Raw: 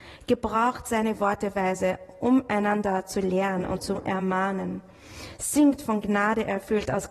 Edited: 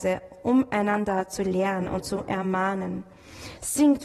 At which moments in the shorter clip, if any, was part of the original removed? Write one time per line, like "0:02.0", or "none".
none